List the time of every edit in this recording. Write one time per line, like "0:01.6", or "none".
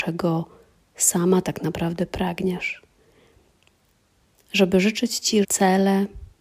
0:04.3
0:05.4